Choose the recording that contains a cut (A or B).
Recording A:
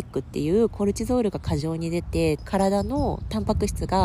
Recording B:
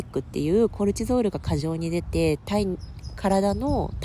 A